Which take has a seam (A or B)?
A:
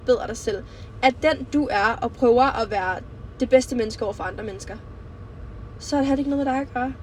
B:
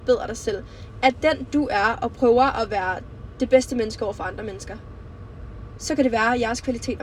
B